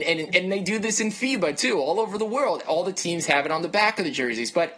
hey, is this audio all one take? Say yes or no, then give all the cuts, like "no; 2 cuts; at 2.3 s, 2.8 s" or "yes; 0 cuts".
yes; 0 cuts